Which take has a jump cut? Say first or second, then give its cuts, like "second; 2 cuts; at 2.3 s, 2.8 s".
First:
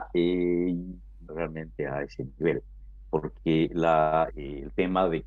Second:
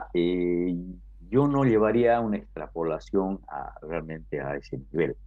first; 2 cuts; at 1.3 s, 4.3 s